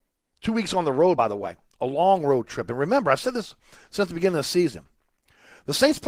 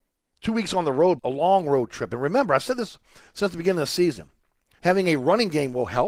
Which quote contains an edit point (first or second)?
second